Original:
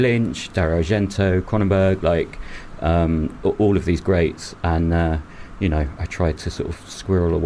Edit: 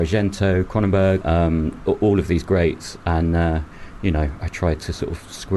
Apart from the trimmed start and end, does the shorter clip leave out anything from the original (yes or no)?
yes